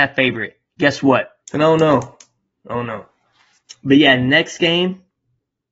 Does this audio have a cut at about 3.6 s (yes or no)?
no